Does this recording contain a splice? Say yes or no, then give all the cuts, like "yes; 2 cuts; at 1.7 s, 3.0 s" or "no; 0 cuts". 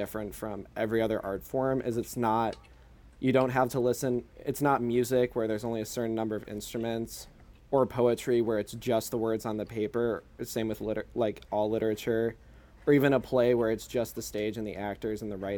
no; 0 cuts